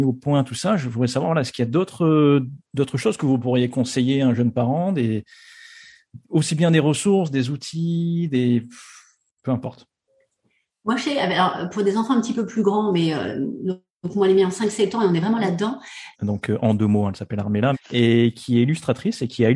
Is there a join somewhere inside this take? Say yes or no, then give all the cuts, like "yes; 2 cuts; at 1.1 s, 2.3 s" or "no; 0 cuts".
yes; 2 cuts; at 16.1 s, 17.7 s